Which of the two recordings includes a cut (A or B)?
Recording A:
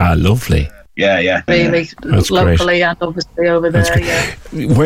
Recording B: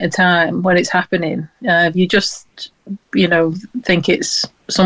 A